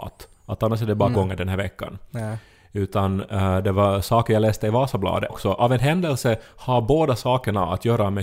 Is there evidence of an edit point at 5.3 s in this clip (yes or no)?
yes